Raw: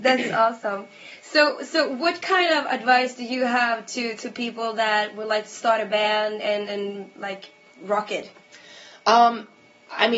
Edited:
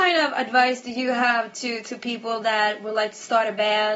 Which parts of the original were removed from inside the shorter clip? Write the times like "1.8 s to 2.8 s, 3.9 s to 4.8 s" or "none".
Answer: none